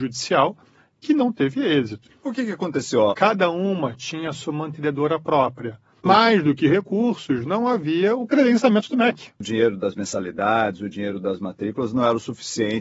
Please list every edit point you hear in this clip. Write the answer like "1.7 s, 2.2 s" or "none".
2.1 s, 3.1 s, 6.0 s